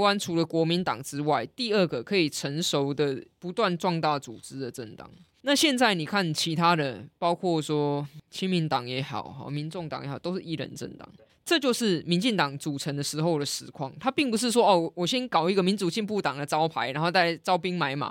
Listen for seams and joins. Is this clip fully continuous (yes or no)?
no